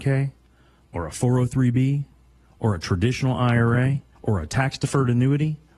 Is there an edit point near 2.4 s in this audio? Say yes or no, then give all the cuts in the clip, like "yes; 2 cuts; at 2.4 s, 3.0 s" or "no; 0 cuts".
no; 1 cut; at 4.1 s